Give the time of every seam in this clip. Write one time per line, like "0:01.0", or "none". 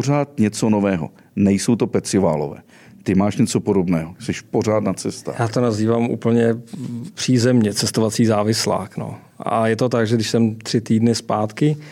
none